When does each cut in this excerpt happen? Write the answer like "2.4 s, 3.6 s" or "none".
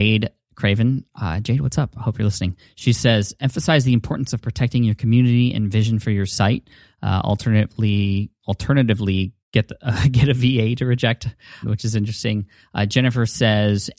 9.4 s, 11.6 s